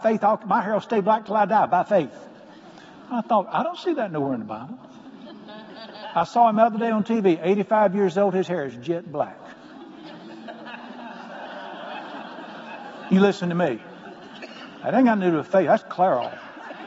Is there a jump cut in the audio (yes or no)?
no